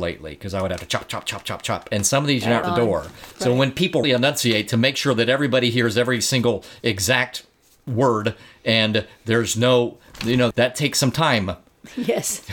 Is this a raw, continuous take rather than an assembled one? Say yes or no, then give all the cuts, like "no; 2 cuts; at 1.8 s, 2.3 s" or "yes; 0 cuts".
no; 3 cuts; at 2.6 s, 4.0 s, 10.5 s